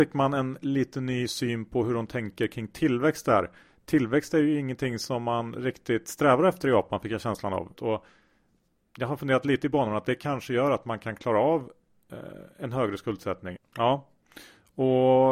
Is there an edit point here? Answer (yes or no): yes